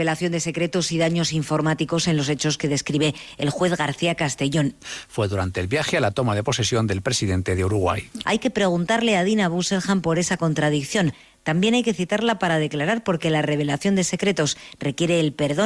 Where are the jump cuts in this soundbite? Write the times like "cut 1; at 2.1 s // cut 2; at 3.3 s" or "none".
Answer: cut 1; at 4.8 s // cut 2; at 8.2 s